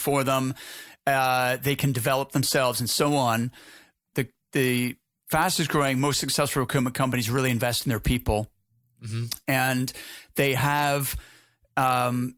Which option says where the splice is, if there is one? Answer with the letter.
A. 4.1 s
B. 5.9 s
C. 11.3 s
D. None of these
A